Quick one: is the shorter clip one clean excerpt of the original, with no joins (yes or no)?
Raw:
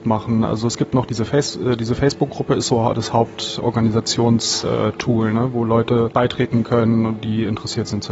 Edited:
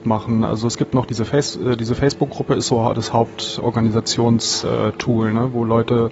yes